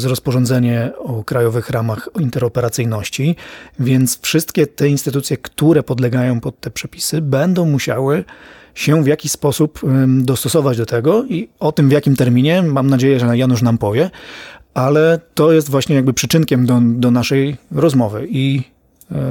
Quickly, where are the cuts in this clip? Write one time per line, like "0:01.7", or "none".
none